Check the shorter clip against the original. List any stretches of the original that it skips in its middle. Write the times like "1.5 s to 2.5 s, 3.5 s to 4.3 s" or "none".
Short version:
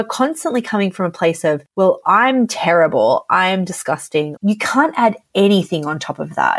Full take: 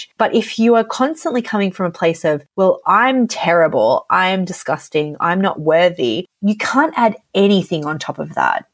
5.2 s to 6.4 s